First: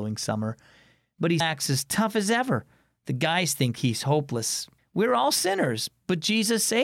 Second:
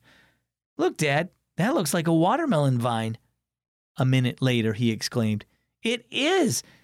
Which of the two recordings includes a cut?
first; 2 cuts; at 1.4 s, 4.8 s

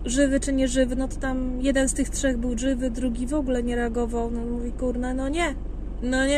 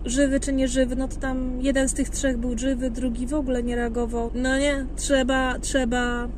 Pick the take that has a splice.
second; 1 cut; at 4.3 s

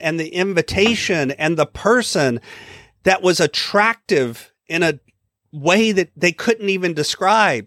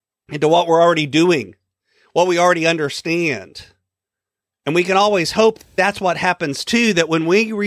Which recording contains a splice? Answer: second; 1 cut; at 4.5 s

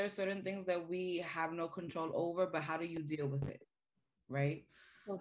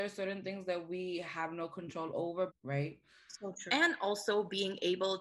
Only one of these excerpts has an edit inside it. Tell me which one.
second; 2 cuts; at 2.5 s, 3.7 s

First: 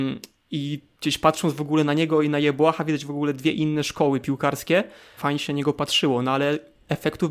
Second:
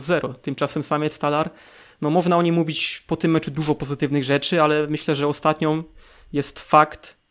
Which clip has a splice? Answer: first; 1 cut; at 5.2 s

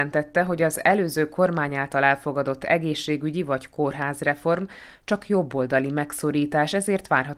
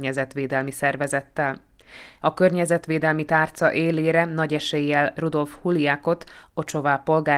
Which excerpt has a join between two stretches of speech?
second; 1 cut; at 2.2 s

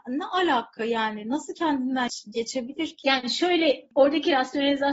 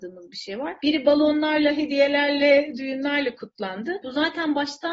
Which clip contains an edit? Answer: second; 1 cut; at 4.0 s

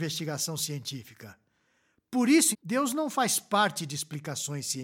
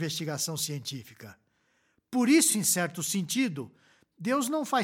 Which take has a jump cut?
first; 1 cut; at 2.5 s

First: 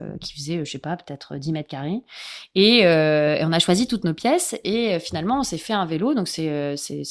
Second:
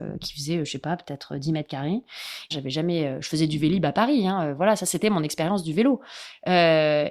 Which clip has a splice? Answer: second; 1 cut; at 2.5 s

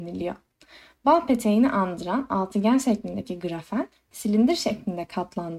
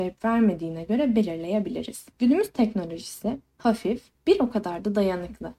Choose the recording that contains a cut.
second; 2 cuts; at 2.1 s, 4.2 s

